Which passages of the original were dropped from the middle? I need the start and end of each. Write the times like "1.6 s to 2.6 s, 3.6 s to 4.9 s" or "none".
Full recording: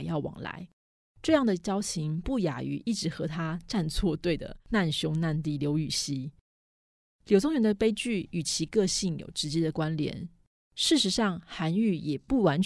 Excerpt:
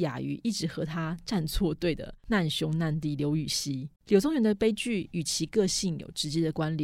6.4 s to 7.2 s

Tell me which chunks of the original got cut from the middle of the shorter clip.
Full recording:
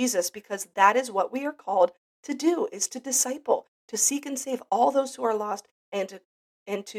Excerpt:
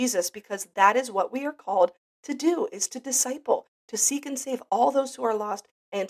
none

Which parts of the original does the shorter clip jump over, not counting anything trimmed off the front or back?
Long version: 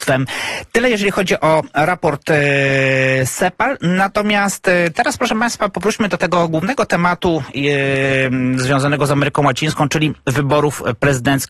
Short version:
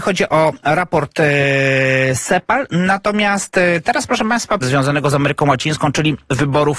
5.7 s to 8.6 s

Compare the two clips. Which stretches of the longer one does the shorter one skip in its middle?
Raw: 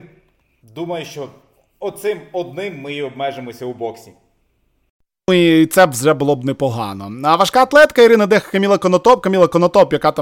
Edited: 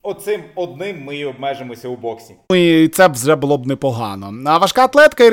4.2 s to 5.2 s

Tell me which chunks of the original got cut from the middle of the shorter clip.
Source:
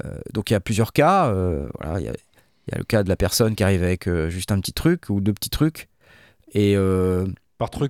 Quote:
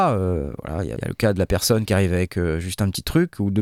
2.1 s to 2.7 s

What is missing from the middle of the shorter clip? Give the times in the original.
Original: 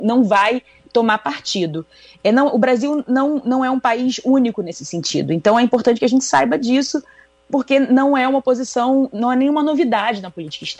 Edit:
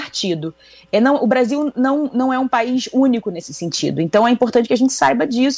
none

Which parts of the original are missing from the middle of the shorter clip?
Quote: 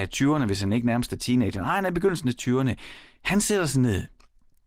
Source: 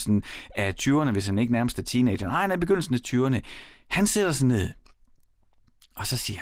none

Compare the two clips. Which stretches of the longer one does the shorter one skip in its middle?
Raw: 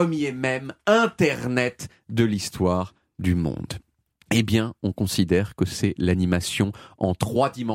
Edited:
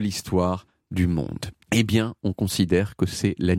3.9 s to 4.2 s

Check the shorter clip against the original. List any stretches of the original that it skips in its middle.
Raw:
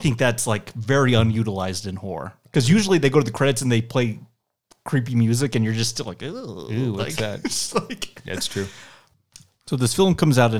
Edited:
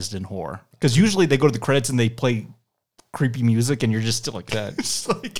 6.2 s to 7.2 s

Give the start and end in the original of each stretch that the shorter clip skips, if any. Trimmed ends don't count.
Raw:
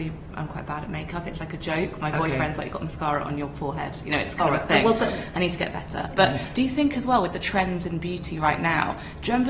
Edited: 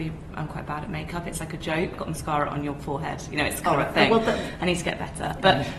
1.9 s to 2.7 s

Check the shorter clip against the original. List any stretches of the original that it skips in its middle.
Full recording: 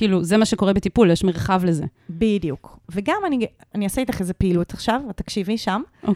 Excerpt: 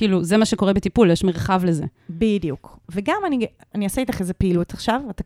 none

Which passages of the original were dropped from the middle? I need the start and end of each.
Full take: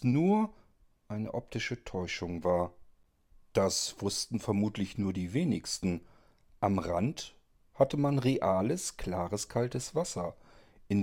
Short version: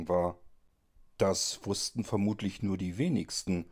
none

